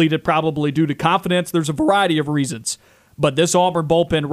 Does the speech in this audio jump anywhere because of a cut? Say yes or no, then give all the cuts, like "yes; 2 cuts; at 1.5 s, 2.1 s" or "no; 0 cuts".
no; 0 cuts